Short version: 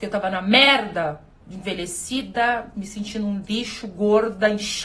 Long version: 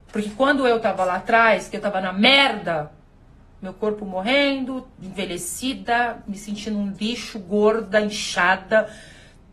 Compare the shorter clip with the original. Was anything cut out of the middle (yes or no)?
yes